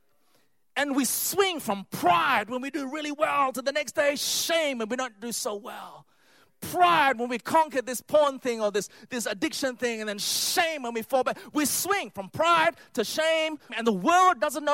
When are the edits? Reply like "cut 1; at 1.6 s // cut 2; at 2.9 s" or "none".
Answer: cut 1; at 13.7 s